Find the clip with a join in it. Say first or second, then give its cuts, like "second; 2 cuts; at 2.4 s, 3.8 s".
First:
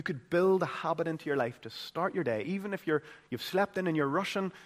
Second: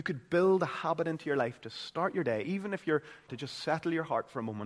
second; 1 cut; at 3.3 s